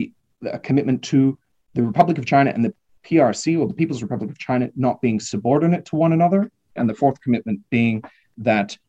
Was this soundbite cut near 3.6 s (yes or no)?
no